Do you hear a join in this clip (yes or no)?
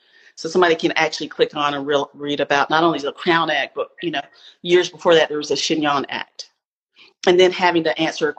no